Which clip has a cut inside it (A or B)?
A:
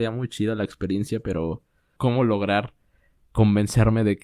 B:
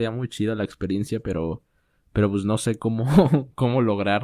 A